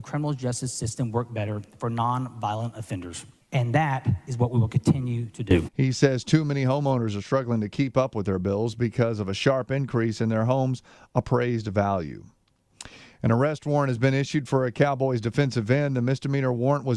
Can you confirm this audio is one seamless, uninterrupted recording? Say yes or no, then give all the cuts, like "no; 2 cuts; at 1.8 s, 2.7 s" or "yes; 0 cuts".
no; 1 cut; at 5.7 s